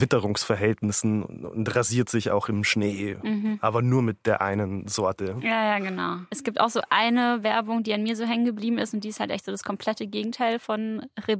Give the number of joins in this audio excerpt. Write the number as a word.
zero